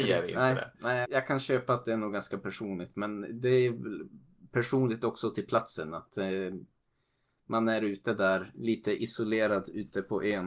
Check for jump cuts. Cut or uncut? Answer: cut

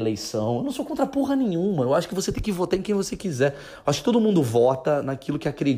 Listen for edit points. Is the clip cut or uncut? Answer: uncut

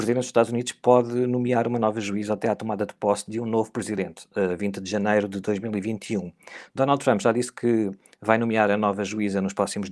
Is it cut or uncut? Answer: cut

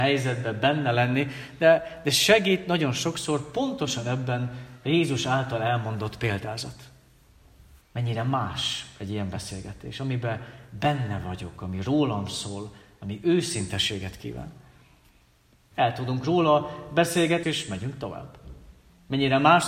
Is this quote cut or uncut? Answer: cut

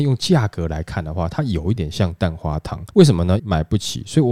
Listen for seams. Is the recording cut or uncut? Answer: cut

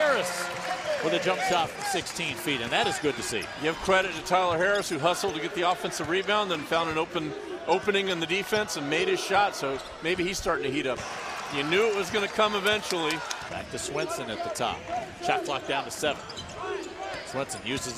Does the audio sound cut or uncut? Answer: cut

